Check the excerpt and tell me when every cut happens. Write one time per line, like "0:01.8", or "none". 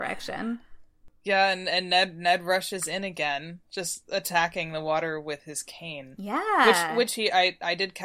none